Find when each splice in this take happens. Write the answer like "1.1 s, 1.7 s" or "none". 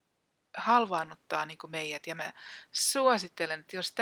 none